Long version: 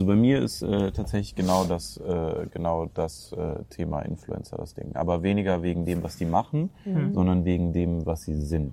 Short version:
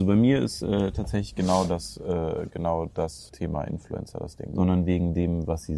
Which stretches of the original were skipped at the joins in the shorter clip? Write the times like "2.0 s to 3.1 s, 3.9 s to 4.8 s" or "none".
3.3 s to 3.7 s, 4.9 s to 7.1 s